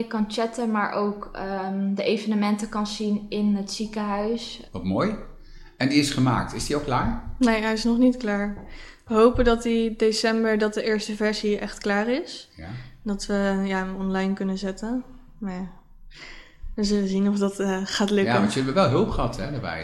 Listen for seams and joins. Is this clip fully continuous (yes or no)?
yes